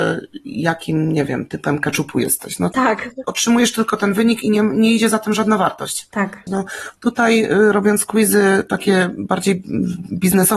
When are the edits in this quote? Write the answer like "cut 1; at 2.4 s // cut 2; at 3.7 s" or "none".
cut 1; at 3.2 s // cut 2; at 6.5 s